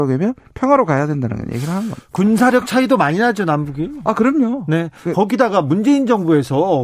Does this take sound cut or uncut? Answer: uncut